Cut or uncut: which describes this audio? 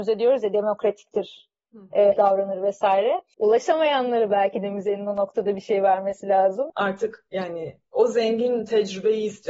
cut